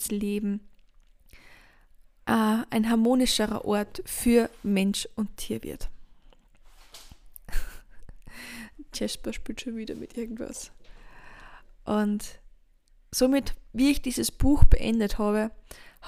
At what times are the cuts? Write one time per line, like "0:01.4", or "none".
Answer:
none